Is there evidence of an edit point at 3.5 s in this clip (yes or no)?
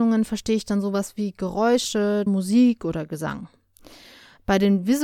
no